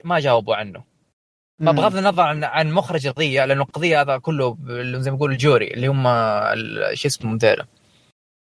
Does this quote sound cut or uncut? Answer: uncut